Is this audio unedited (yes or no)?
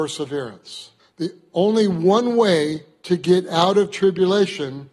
no